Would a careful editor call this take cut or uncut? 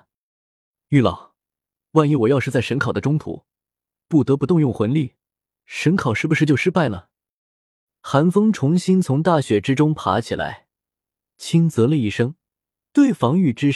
uncut